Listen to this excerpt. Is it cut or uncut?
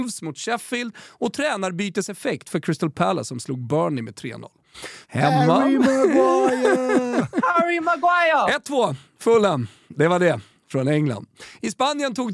cut